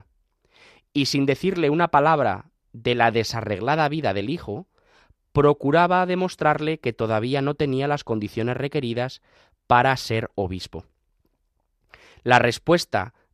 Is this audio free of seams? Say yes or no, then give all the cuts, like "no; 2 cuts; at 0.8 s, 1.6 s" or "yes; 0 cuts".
yes; 0 cuts